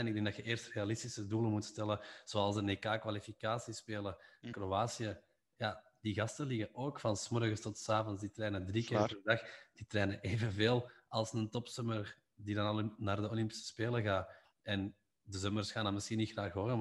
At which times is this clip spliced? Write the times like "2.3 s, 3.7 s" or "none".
4.5 s